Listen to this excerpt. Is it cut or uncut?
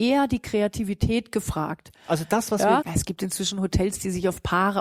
cut